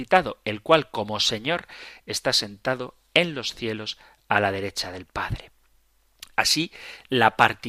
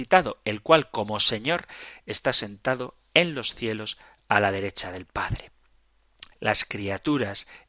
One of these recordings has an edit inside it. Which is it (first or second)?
second